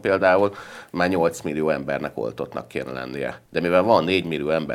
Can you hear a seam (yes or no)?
yes